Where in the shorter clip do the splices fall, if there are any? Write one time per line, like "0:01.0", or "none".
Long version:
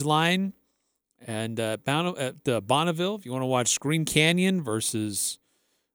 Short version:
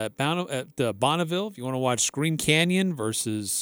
none